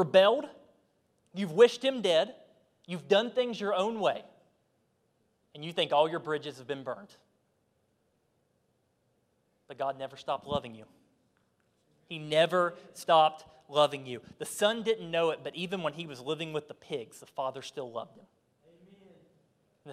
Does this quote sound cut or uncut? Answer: uncut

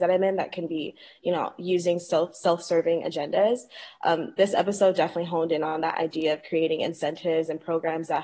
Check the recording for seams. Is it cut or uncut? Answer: uncut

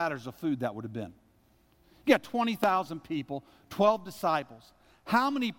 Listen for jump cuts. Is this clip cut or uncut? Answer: uncut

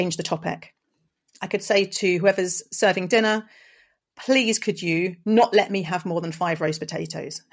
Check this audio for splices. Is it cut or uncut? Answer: uncut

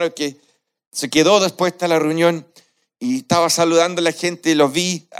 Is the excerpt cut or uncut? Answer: uncut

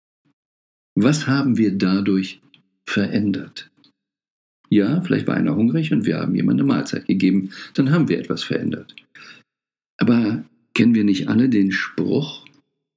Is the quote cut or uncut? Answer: uncut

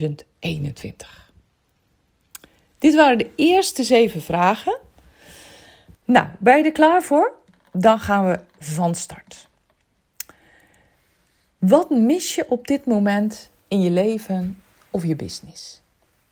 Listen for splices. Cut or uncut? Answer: cut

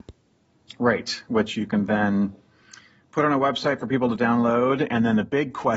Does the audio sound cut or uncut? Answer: uncut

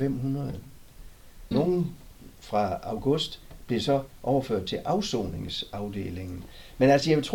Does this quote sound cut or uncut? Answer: cut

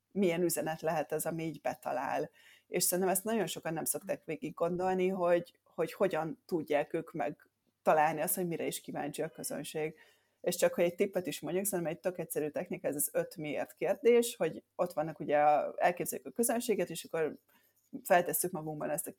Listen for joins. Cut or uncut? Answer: uncut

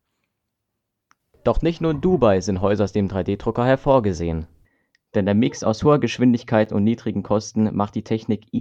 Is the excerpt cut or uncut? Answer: uncut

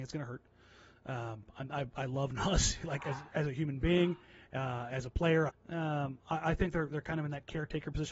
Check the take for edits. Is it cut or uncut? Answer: cut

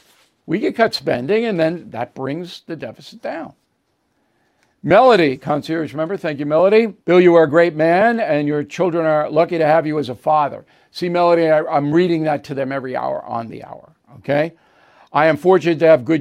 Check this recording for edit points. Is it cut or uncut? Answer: cut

